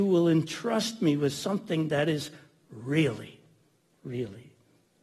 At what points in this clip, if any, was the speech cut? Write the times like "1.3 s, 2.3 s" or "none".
none